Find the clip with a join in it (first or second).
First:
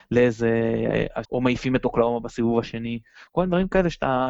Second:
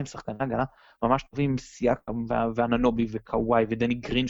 first